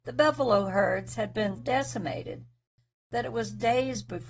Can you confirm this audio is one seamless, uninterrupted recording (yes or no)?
no